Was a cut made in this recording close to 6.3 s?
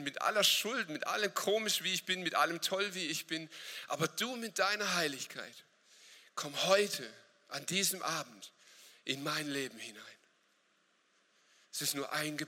no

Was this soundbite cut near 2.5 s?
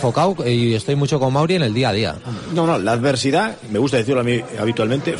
no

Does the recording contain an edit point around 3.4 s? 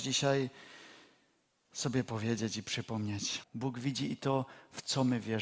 yes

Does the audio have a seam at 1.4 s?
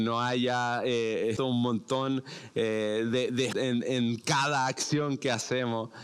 yes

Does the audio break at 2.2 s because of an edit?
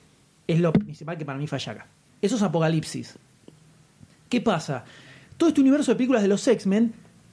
yes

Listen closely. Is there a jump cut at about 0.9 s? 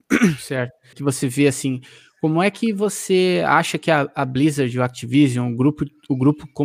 yes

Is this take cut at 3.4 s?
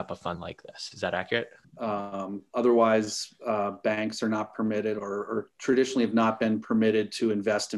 no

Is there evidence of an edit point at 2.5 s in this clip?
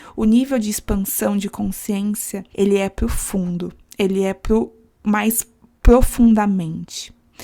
yes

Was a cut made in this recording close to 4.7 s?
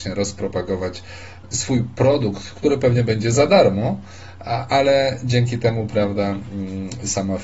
no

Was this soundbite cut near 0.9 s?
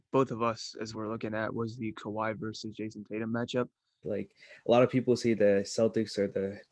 yes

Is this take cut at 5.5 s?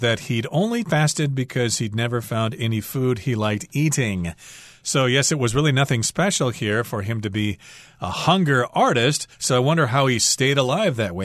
no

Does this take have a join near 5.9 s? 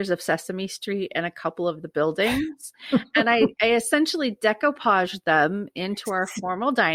no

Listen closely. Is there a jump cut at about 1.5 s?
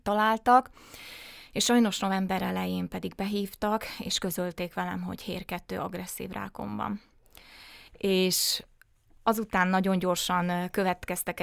no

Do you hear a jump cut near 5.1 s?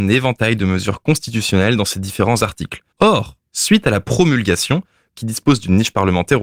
yes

